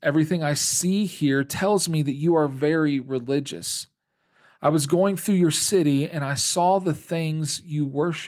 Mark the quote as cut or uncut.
uncut